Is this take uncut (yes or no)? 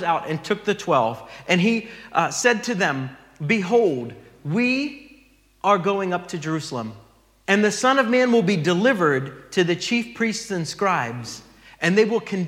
yes